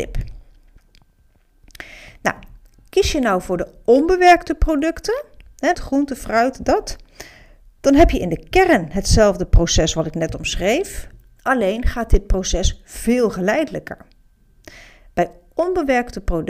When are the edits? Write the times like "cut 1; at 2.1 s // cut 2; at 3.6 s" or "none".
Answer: cut 1; at 5.7 s